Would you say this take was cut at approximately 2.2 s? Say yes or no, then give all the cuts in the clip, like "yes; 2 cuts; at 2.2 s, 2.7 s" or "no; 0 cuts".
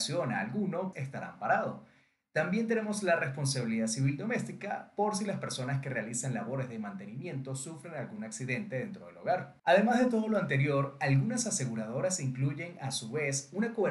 no; 2 cuts; at 0.9 s, 9.6 s